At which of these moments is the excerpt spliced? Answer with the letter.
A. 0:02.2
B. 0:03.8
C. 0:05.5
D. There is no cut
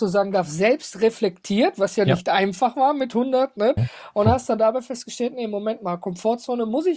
B